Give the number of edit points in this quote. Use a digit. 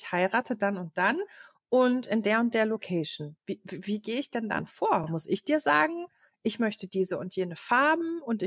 0